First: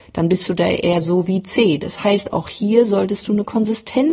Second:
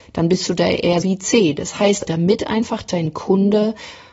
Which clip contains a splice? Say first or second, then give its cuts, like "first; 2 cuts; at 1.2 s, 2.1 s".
second; 2 cuts; at 1.0 s, 2.1 s